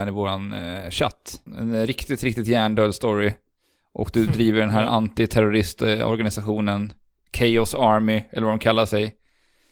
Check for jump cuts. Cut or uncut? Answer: cut